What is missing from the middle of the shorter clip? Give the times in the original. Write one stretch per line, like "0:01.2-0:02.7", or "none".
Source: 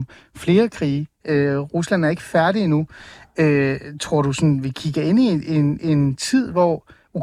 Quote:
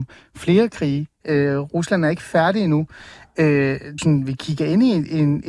0:04.0-0:04.3